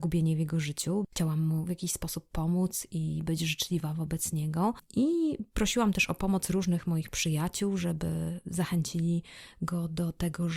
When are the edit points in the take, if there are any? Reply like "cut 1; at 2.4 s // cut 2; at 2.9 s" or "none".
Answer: cut 1; at 1.0 s